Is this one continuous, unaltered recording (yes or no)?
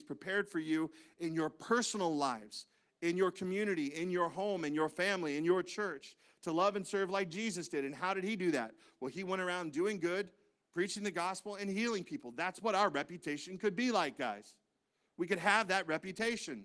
yes